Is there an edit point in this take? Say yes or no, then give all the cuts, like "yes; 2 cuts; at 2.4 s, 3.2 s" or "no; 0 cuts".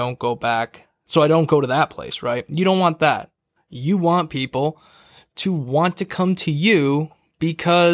no; 0 cuts